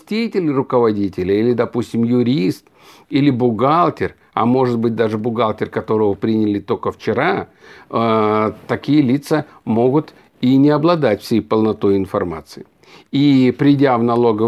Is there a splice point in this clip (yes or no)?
no